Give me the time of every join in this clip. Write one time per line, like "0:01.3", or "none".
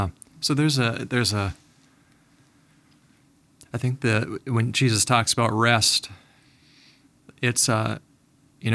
none